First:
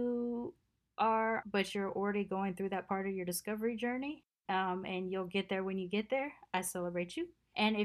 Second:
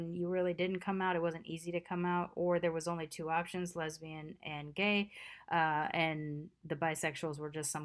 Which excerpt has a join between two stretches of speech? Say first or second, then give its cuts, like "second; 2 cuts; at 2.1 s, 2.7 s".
first; 1 cut; at 1.4 s